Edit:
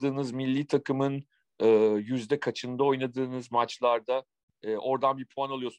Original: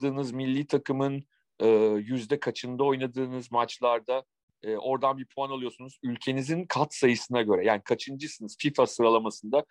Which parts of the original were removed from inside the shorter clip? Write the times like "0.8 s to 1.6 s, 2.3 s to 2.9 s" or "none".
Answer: none